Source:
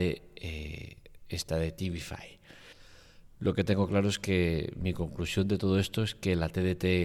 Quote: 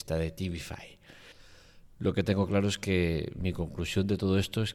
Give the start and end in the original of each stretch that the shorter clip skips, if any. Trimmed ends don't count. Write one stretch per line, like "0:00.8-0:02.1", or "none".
none